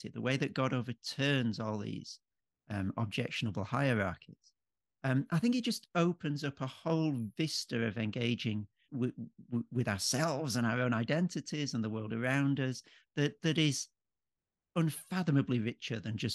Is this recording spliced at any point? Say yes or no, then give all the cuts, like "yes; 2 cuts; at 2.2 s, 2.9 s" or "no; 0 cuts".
yes; 1 cut; at 8.8 s